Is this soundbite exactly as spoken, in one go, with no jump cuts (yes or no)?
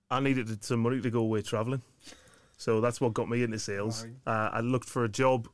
yes